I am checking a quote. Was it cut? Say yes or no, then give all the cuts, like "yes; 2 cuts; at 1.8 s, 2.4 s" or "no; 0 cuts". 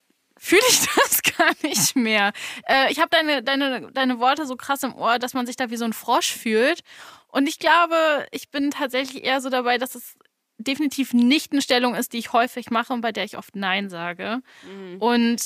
no; 0 cuts